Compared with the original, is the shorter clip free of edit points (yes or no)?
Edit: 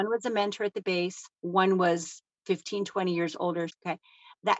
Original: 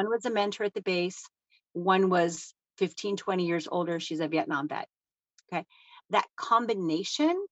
no